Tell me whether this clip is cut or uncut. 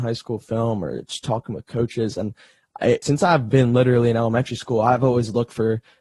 cut